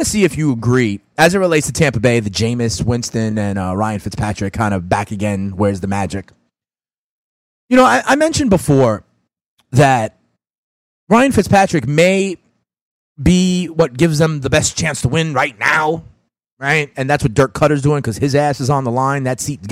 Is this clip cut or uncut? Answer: uncut